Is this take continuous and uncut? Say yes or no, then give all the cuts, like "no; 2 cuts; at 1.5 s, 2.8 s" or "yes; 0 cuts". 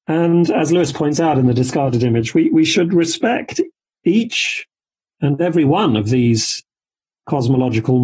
yes; 0 cuts